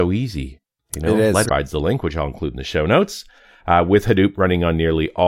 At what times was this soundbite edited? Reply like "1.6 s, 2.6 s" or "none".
1.4 s